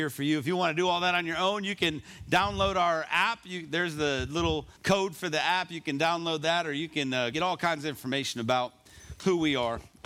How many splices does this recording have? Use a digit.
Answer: 2